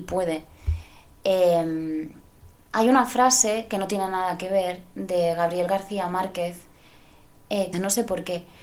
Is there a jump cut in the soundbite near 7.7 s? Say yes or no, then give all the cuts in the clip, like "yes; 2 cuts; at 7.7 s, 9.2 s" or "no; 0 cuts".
yes; 1 cut; at 7.7 s